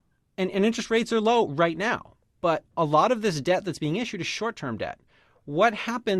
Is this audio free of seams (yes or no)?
yes